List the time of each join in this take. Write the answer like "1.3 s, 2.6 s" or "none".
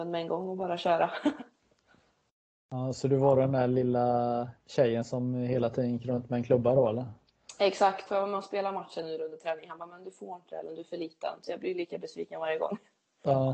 8.1 s

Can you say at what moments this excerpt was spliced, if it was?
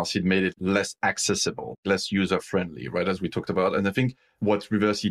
none

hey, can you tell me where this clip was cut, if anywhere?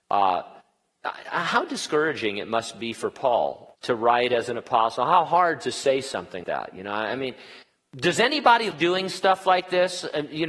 3.8 s, 6.4 s, 8.7 s

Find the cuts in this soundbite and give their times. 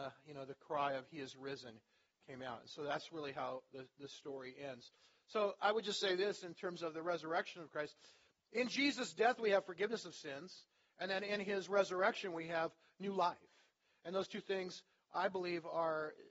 none

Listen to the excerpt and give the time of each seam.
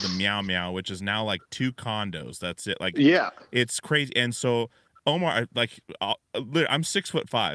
none

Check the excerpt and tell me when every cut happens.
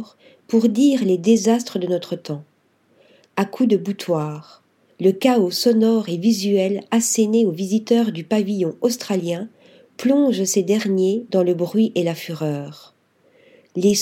4.9 s

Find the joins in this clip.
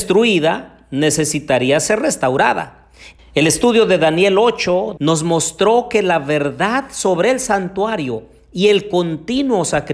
3.2 s, 5.0 s

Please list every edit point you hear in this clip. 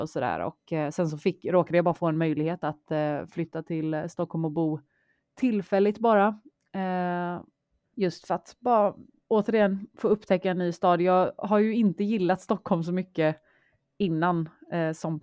7.8 s

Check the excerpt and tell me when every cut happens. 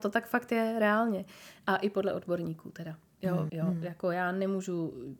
3.5 s

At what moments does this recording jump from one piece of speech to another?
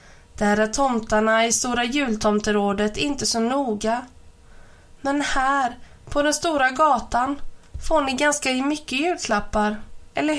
none

